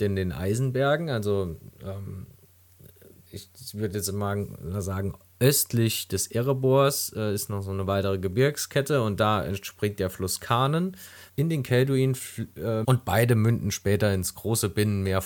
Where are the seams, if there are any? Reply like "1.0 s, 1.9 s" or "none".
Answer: 11.3 s, 12.8 s